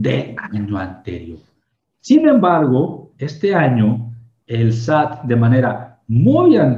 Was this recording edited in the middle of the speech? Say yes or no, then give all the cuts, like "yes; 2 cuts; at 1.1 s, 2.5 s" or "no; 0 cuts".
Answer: no; 0 cuts